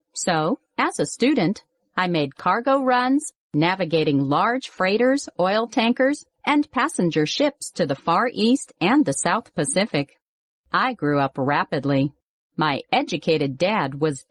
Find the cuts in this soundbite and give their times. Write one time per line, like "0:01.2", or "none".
0:10.6
0:12.5